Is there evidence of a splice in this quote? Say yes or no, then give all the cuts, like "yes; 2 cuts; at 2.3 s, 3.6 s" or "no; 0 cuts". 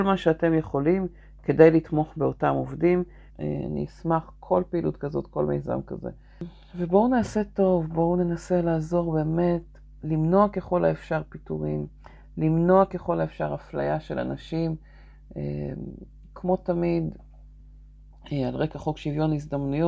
yes; 1 cut; at 3.3 s